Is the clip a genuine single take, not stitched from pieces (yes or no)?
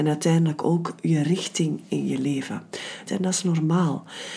no